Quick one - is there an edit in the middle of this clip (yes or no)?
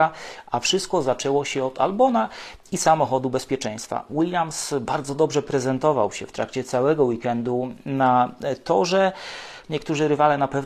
yes